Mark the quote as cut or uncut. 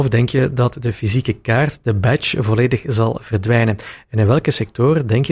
uncut